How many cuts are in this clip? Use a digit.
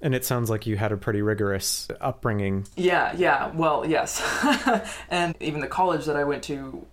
1